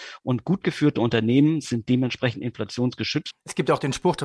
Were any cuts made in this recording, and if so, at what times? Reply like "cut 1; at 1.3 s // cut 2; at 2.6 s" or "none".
cut 1; at 3.3 s